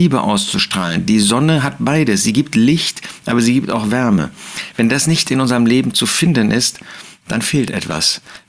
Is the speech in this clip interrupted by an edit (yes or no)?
no